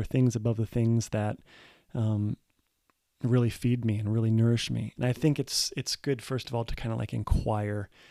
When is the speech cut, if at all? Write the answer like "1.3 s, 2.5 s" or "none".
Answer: 5.0 s